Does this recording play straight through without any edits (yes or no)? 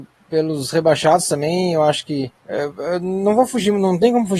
no